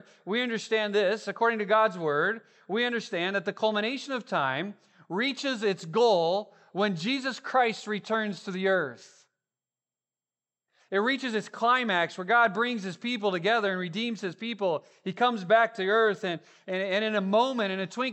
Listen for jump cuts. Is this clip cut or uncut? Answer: uncut